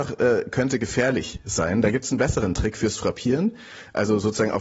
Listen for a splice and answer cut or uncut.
uncut